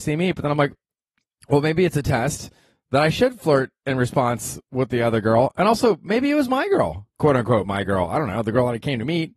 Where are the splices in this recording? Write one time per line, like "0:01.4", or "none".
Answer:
none